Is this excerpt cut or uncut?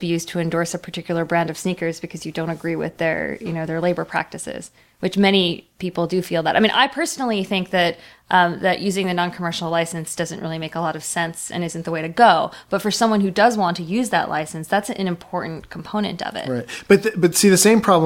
uncut